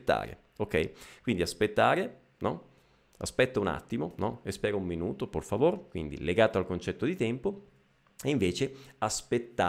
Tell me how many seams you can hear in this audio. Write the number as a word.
one